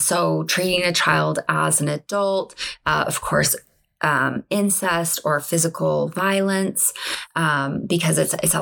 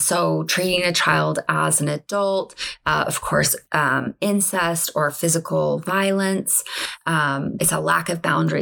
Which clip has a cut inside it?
second; 2 cuts; at 3.7 s, 7.6 s

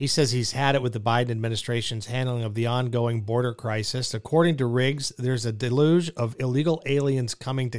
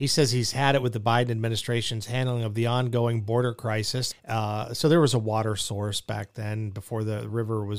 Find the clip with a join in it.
second; 1 cut; at 4.1 s

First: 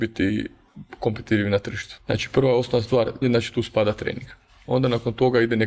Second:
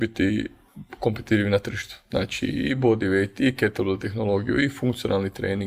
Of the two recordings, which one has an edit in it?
first; 2 cuts; at 2.0 s, 3.2 s

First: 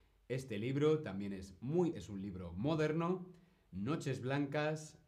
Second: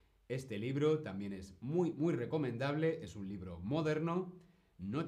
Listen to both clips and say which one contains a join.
first; 1 cut; at 1.9 s

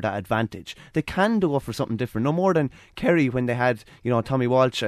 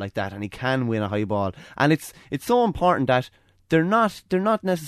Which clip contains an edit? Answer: first; 1 cut; at 0.9 s

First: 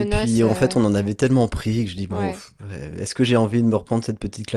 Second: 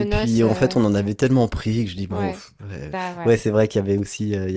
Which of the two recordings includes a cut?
second; 1 cut; at 2.9 s

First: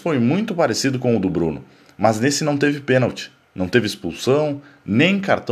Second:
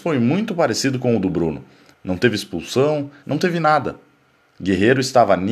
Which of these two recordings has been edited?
second; 2 cuts; at 1.9 s, 3.2 s

